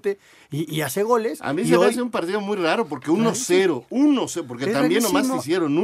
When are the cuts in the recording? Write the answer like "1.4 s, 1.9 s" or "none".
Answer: none